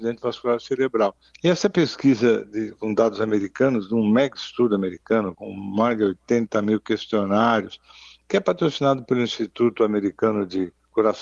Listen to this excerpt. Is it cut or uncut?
cut